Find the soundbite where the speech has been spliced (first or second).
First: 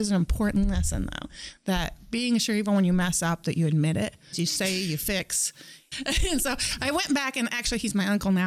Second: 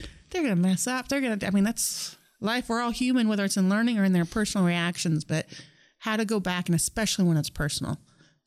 first